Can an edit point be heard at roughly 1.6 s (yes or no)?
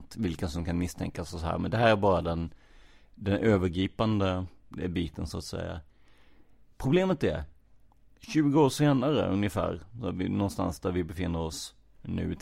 no